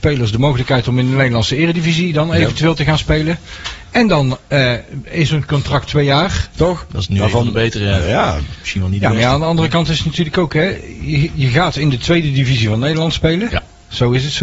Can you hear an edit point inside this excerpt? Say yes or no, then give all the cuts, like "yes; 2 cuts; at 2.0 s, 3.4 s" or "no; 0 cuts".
yes; 1 cut; at 6.5 s